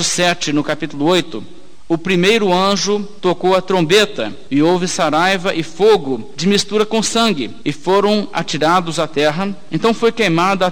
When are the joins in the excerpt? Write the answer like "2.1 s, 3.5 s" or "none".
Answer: none